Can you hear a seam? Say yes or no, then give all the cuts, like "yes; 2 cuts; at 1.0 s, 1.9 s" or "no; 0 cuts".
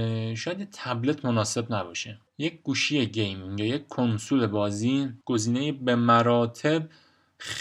yes; 2 cuts; at 2.3 s, 5.2 s